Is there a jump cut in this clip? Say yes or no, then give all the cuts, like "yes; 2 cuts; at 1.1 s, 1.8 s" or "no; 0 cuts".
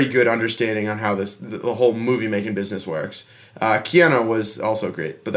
no; 0 cuts